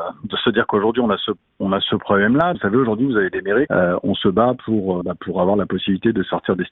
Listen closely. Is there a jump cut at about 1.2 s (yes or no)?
no